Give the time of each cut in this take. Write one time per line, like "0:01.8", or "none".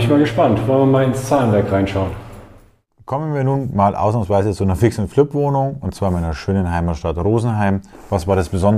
none